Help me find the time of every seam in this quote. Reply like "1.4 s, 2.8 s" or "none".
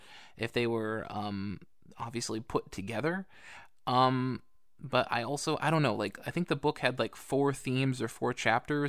none